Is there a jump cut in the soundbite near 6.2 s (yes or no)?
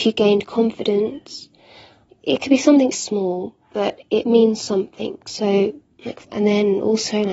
yes